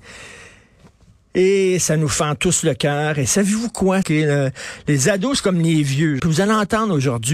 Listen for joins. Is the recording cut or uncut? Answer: cut